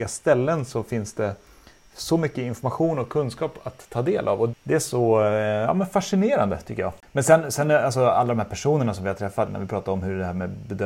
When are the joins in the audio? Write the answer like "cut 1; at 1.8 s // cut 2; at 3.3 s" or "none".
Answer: cut 1; at 9.5 s